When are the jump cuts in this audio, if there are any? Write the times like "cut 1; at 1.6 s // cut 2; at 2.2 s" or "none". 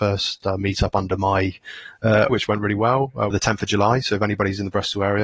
cut 1; at 2.3 s // cut 2; at 3.3 s